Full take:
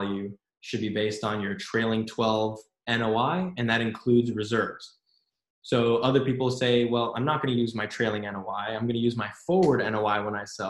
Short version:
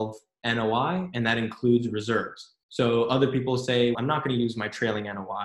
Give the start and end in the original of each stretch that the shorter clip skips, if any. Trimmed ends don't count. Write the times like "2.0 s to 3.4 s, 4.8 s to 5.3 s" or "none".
5.1 s to 5.6 s, 6.9 s to 7.1 s